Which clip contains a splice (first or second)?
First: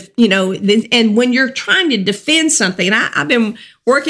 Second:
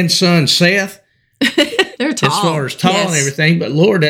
second